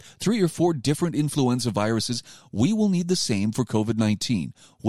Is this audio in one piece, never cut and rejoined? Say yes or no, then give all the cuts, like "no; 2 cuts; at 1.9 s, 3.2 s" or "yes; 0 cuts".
yes; 0 cuts